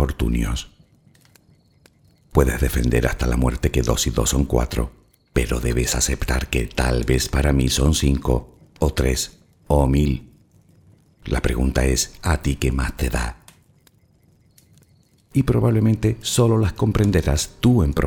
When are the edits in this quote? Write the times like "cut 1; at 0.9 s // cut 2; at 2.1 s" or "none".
cut 1; at 15.2 s